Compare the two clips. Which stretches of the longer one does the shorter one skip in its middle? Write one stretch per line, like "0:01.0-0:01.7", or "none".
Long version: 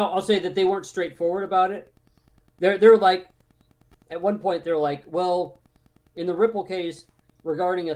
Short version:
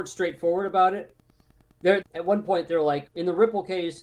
0:02.8-0:04.0
0:05.0-0:06.1